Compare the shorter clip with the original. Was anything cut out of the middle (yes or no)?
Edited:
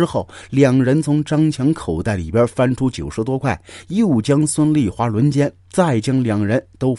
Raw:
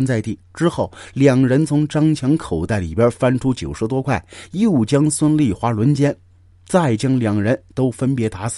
yes